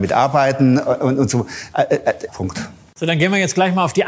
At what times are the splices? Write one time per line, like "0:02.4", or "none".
0:02.3